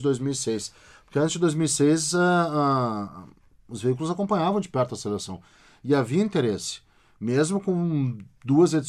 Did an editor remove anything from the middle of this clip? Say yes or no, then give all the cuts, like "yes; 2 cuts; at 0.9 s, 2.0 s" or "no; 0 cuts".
no; 0 cuts